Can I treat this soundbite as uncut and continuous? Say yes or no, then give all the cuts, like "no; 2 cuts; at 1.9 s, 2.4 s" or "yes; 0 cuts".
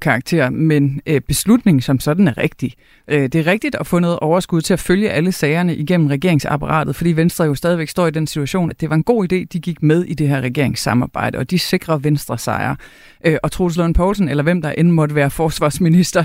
no; 1 cut; at 8.7 s